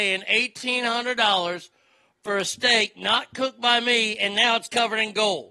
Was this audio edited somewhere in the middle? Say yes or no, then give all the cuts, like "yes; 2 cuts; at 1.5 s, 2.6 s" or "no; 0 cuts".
no; 0 cuts